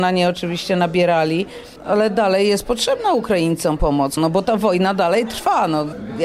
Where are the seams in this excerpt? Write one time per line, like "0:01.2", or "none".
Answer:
0:04.2